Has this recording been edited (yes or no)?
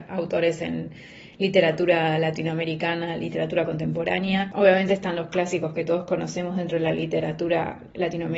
no